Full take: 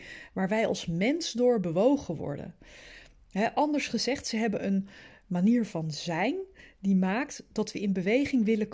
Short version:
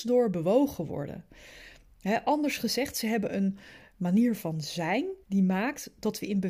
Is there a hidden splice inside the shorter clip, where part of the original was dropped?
yes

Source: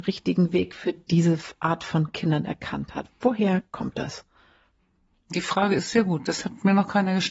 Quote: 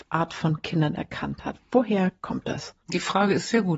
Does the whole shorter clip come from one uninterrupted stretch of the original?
no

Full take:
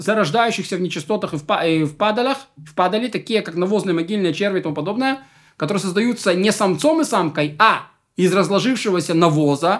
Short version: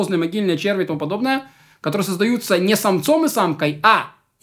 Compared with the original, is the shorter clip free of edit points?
yes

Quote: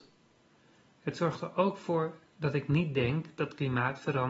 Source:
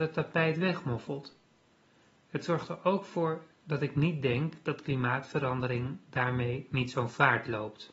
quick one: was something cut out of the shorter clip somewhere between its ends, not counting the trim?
no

